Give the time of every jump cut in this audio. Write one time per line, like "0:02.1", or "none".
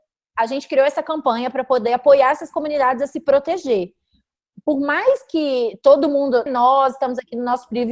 0:06.5